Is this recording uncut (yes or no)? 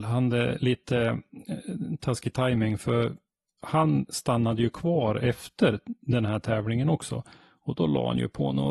yes